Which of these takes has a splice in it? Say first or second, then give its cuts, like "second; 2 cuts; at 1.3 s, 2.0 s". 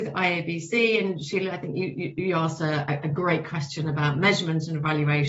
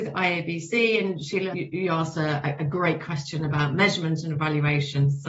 second; 1 cut; at 1.5 s